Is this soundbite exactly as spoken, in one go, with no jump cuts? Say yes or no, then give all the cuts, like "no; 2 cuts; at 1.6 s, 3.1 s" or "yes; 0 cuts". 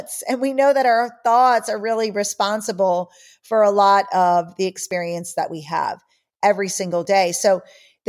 yes; 0 cuts